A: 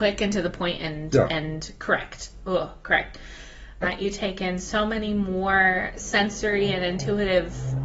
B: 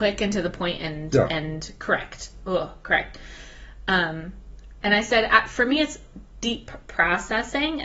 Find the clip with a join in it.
A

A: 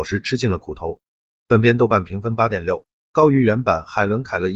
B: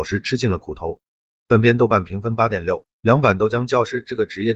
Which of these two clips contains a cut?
B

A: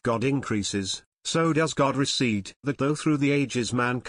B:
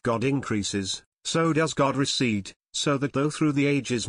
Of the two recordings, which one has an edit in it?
A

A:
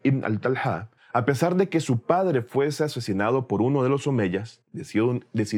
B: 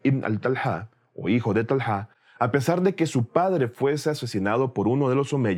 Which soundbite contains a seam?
A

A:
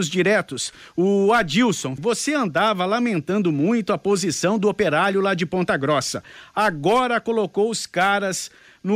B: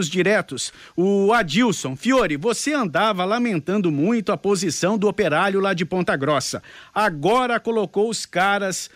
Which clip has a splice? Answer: A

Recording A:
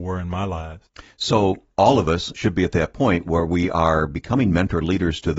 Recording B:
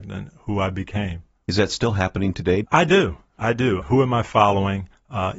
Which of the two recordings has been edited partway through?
B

